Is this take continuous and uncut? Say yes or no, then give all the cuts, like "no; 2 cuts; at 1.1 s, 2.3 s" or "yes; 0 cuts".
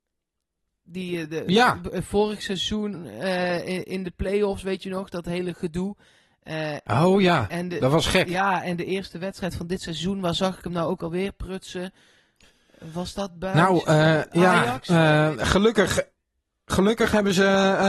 yes; 0 cuts